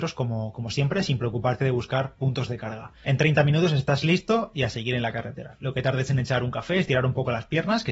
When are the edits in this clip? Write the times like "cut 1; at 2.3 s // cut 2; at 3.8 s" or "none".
cut 1; at 3.0 s